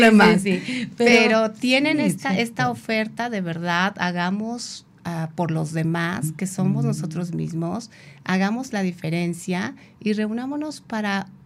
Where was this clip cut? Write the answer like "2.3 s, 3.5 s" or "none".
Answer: none

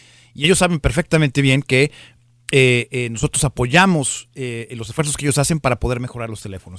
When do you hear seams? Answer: none

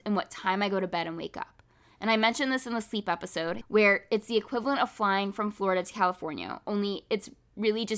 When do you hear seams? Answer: 3.6 s

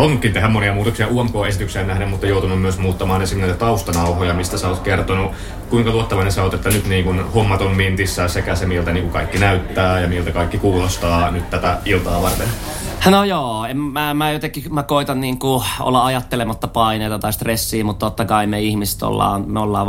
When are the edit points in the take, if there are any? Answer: 13.0 s

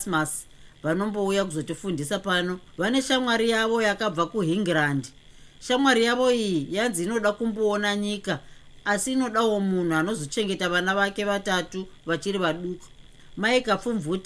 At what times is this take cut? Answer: 2.7 s

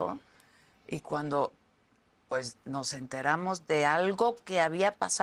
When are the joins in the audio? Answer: none

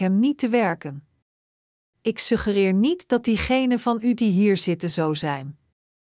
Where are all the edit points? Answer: 1.8 s

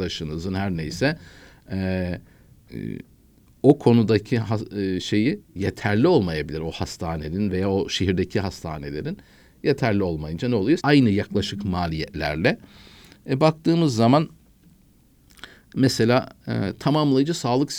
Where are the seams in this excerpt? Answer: 10.8 s

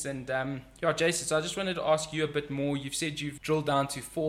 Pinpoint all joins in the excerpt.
3.4 s

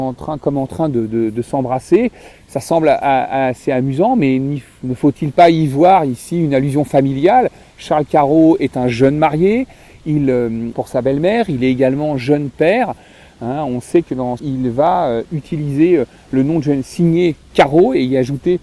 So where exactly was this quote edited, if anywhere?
10.7 s, 14.4 s

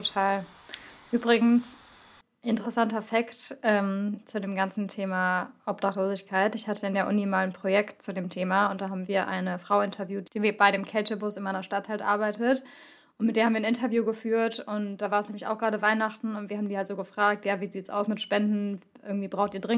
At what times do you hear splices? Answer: none

